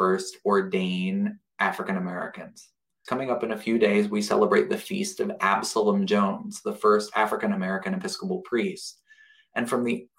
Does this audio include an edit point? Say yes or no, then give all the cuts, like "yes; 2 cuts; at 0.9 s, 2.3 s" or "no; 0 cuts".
yes; 1 cut; at 3.1 s